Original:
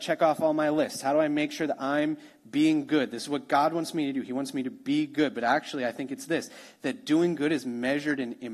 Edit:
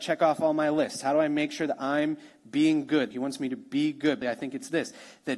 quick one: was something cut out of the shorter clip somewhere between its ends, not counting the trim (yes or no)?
yes